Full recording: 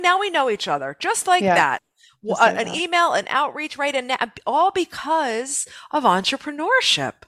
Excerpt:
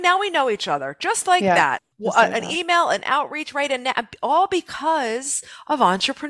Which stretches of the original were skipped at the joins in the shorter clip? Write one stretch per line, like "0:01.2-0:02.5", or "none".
0:01.9-0:02.2